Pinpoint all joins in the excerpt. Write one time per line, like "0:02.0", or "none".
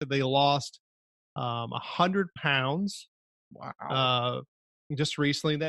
none